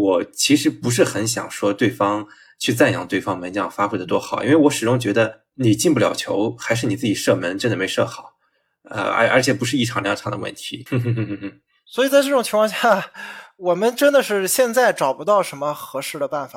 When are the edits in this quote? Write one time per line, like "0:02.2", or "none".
0:10.9